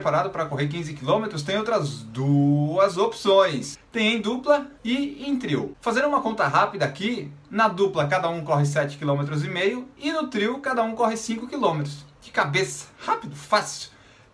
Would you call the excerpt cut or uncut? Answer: cut